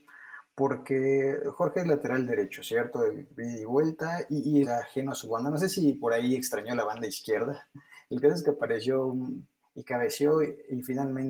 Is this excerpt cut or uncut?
cut